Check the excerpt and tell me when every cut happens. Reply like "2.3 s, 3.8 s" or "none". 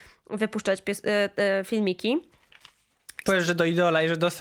3.3 s